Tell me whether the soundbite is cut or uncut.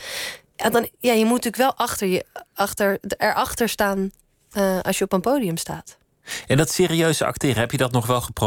uncut